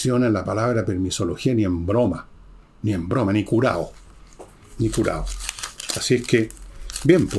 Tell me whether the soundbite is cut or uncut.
uncut